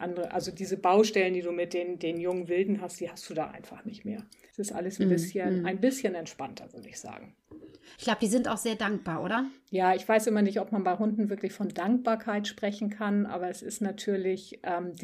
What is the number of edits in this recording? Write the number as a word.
one